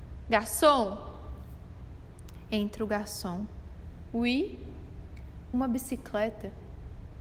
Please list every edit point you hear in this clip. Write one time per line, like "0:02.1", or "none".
none